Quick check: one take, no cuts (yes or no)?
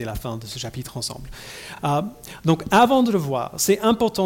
yes